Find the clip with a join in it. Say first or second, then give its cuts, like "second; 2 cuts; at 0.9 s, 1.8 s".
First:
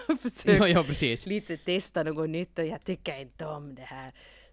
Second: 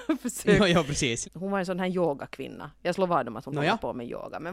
second; 1 cut; at 1.2 s